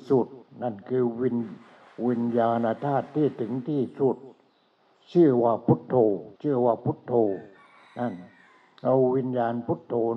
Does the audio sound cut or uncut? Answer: cut